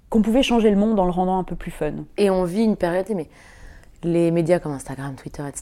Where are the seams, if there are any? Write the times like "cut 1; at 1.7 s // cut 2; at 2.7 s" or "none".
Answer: cut 1; at 3.1 s